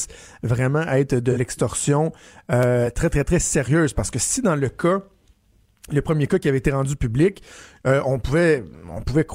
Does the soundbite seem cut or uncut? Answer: uncut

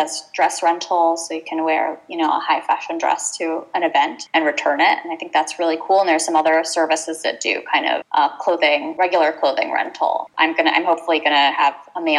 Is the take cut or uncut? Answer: uncut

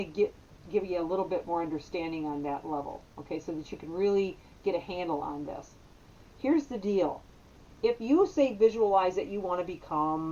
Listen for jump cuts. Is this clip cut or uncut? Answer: uncut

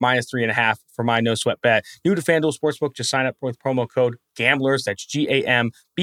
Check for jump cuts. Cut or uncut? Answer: uncut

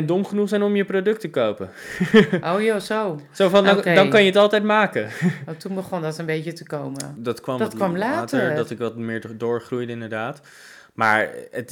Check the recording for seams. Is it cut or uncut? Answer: cut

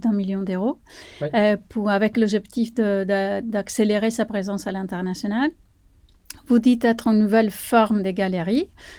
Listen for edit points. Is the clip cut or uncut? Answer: uncut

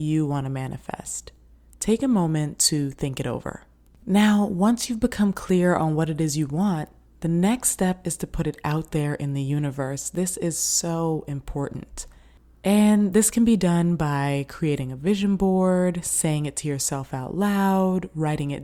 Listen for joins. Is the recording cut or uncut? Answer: uncut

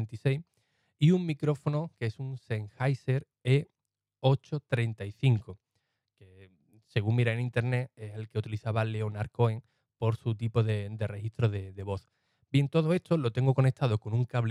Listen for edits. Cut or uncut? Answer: uncut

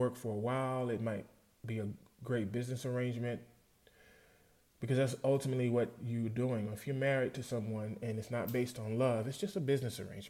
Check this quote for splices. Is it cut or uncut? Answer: uncut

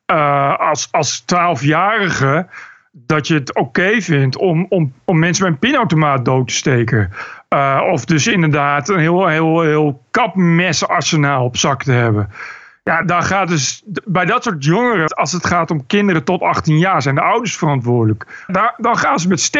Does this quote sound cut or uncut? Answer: cut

